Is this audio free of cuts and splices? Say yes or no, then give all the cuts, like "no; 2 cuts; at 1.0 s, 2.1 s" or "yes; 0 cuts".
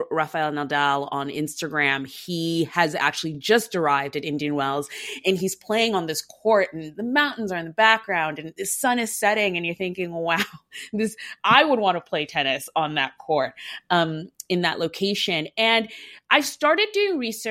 yes; 0 cuts